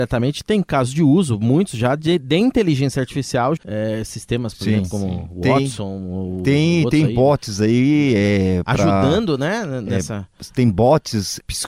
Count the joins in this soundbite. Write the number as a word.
one